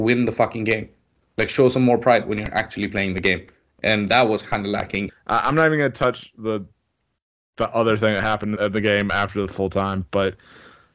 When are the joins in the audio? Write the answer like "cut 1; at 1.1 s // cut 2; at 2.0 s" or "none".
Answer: cut 1; at 5.1 s // cut 2; at 8.6 s